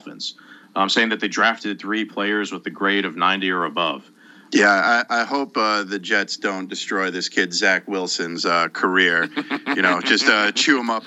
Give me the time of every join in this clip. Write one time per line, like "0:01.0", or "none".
0:04.5